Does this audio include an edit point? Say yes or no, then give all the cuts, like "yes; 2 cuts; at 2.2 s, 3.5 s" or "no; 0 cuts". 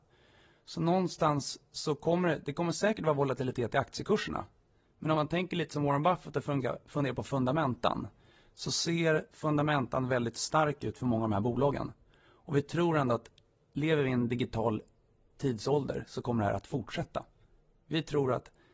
no; 0 cuts